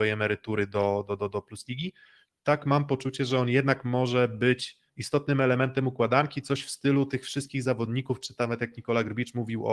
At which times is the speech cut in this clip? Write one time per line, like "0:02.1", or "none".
0:04.9